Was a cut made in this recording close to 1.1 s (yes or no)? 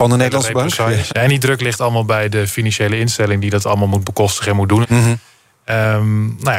yes